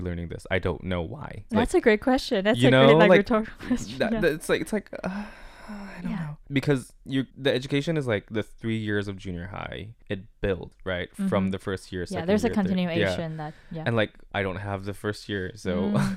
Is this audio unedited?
no; 1 cut; at 1.5 s

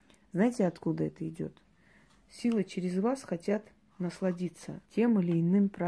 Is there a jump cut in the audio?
yes; 1 cut; at 4.9 s

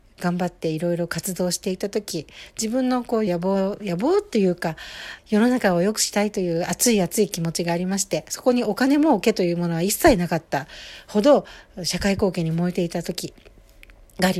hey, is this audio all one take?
no; 2 cuts; at 3.3 s, 5.2 s

